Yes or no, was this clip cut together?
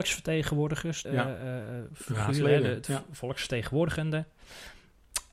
yes